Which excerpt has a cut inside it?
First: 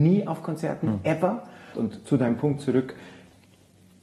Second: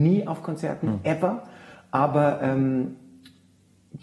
first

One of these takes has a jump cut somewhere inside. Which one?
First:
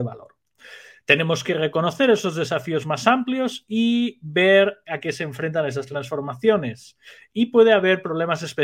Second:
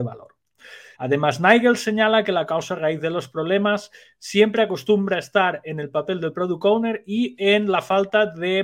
second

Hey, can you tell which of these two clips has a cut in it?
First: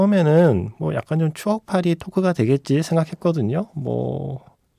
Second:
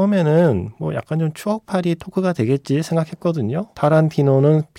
second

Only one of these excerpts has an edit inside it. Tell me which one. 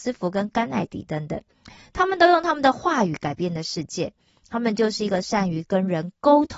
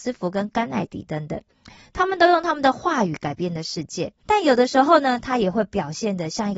second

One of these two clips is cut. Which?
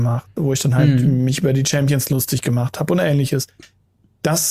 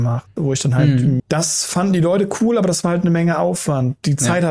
second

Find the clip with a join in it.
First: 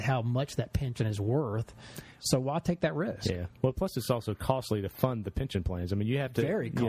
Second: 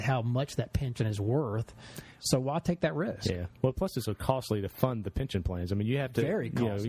second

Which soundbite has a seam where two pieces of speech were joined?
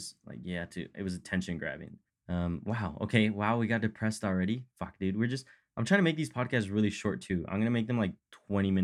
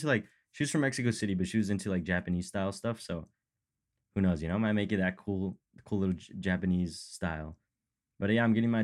first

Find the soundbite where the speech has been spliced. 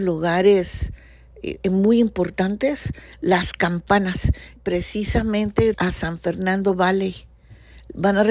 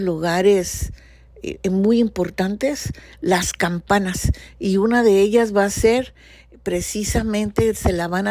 first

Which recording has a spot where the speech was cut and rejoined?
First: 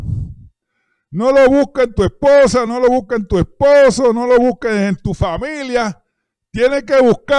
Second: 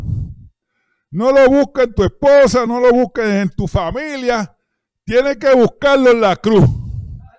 second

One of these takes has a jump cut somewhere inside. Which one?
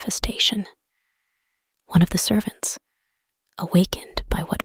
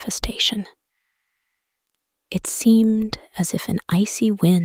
first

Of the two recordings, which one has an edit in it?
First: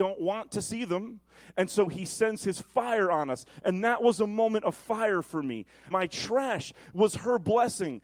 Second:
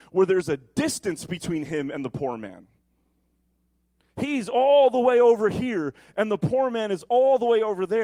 first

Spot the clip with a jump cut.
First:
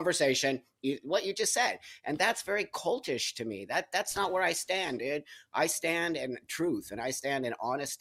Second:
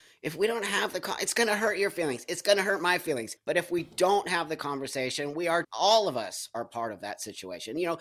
second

